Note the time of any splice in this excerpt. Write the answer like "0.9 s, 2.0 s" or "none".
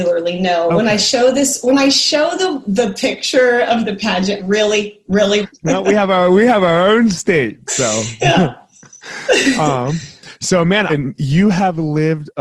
4.4 s, 5.4 s, 10.9 s